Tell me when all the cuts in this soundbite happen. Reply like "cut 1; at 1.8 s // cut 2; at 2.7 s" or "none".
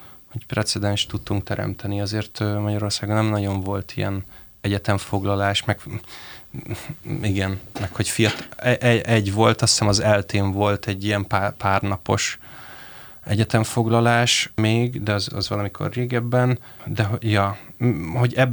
cut 1; at 15.3 s

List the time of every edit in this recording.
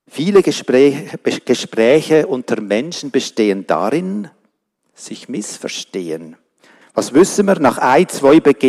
cut 1; at 4.8 s // cut 2; at 6.8 s

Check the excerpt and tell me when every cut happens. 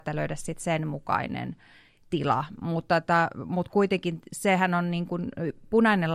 none

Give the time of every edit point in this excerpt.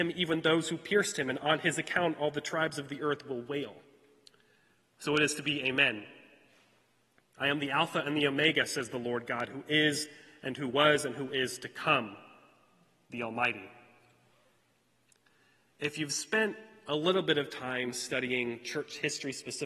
none

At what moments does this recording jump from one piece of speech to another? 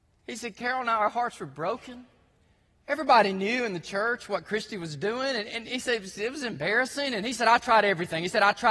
none

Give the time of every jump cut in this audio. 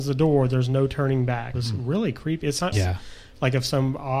cut 1; at 1.5 s // cut 2; at 2.7 s

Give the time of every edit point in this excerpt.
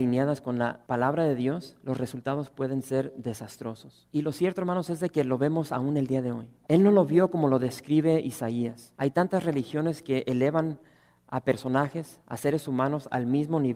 cut 1; at 4.1 s // cut 2; at 6.6 s // cut 3; at 8.9 s

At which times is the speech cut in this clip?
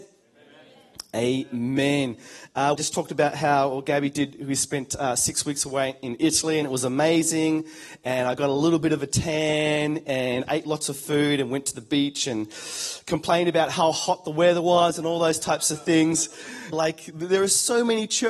cut 1; at 2.8 s // cut 2; at 16.7 s

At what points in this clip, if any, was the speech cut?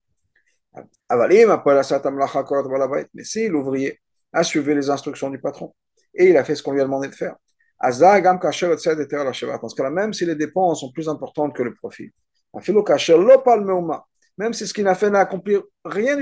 cut 1; at 1.0 s

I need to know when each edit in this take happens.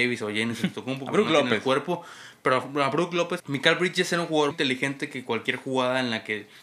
cut 1; at 3.4 s // cut 2; at 4.5 s

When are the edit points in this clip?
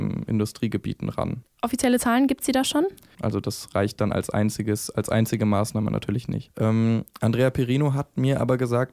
cut 1; at 1.4 s // cut 2; at 3.2 s // cut 3; at 6.5 s

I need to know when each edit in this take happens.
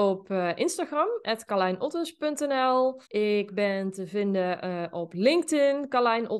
cut 1; at 3.1 s

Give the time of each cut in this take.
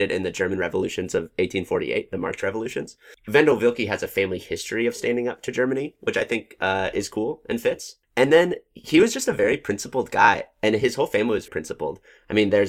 cut 1; at 11.5 s

